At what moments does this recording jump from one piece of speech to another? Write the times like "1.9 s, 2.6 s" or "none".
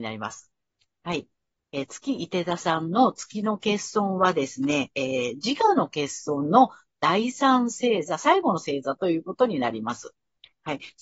none